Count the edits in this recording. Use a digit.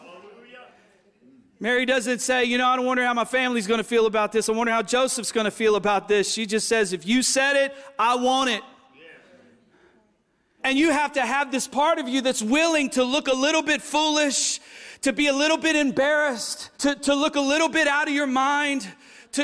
2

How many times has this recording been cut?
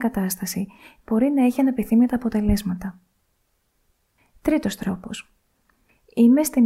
0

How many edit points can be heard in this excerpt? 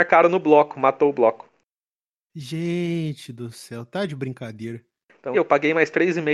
1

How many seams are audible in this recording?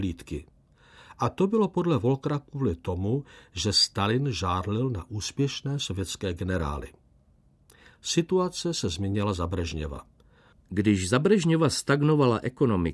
1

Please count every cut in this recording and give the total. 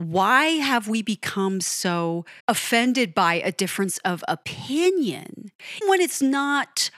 2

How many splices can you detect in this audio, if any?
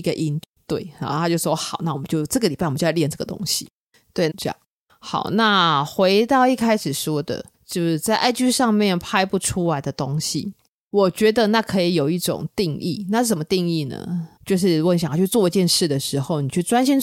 3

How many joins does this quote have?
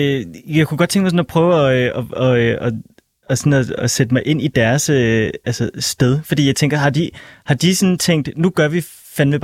1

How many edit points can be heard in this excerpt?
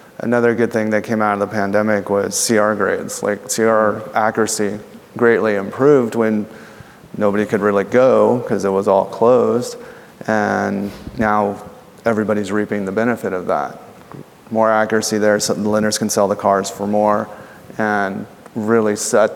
0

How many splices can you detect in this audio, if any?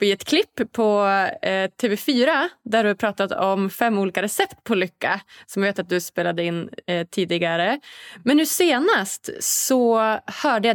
0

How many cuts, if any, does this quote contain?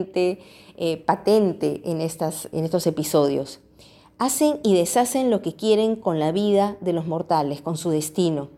1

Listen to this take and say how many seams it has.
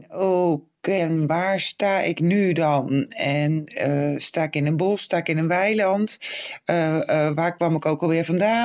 1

